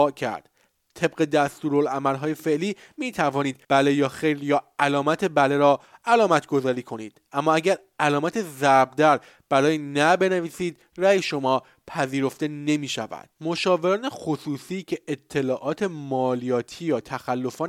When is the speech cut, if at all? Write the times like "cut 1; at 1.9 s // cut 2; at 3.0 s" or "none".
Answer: cut 1; at 3.6 s // cut 2; at 13.3 s